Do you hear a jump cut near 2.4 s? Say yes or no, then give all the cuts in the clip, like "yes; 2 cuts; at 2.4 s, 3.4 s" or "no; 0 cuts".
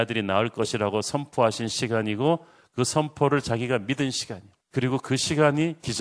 no; 1 cut; at 4.6 s